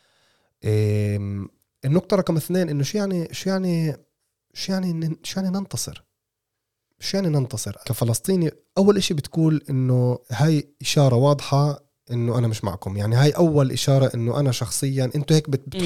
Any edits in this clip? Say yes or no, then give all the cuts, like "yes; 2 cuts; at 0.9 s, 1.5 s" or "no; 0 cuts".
yes; 2 cuts; at 7.8 s, 10.2 s